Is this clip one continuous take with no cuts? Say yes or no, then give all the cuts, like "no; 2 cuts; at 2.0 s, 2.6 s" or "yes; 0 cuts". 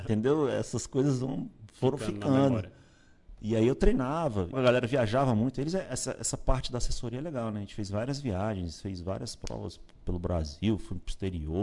no; 1 cut; at 4.5 s